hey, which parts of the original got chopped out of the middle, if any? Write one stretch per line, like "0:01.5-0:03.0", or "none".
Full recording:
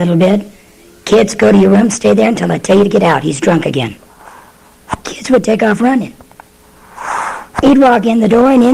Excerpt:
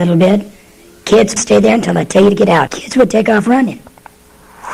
0:01.4-0:01.9
0:03.2-0:05.0